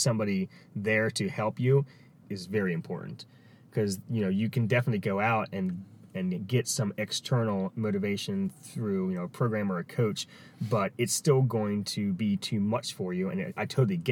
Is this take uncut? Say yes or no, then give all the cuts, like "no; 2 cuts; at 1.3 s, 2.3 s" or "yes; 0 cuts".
no; 1 cut; at 2.2 s